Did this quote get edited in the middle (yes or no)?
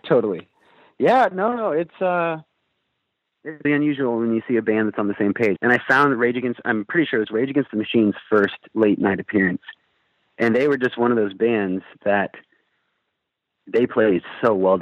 yes